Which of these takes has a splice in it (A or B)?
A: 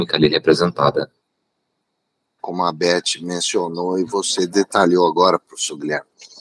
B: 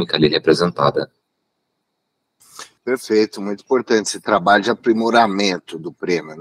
A